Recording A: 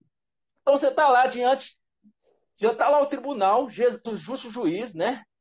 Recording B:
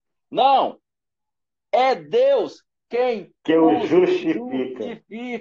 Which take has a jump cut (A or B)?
A